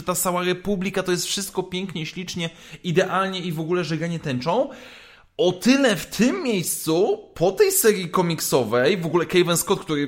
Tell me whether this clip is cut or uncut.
uncut